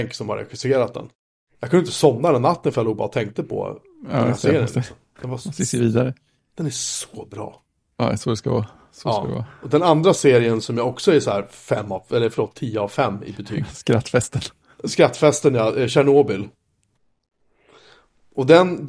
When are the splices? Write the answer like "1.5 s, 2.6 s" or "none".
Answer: 1.5 s